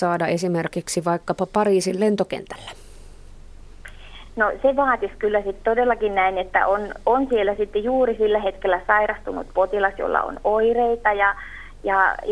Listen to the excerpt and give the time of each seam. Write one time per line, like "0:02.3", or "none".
none